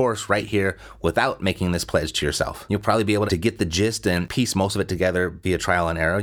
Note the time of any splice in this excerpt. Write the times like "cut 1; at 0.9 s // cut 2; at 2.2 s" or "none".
cut 1; at 3.3 s